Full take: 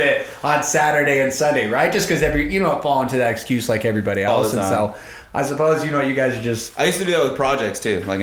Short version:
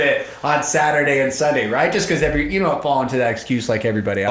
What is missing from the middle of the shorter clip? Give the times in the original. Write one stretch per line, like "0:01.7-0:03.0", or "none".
none